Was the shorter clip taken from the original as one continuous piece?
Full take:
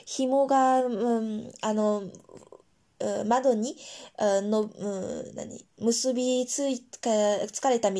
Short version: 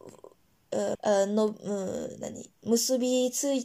no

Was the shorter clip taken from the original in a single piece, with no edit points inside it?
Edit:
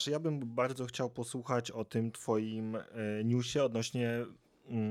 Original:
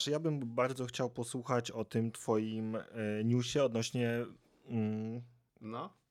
yes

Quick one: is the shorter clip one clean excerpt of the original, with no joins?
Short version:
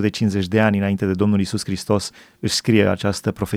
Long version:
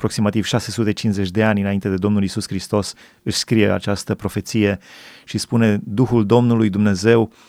yes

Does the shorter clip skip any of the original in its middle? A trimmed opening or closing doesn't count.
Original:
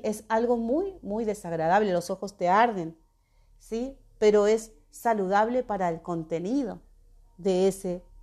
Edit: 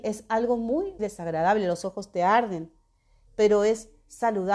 yes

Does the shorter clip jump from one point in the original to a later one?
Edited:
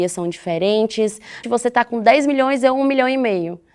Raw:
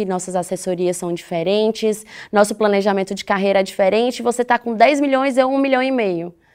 yes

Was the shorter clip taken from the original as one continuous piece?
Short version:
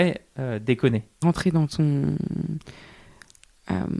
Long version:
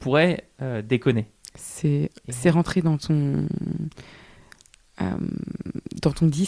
no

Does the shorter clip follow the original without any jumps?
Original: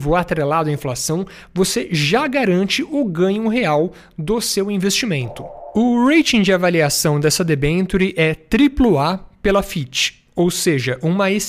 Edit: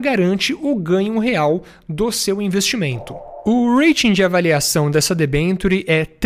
yes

